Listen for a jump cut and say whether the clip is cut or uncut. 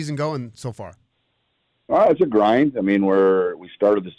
uncut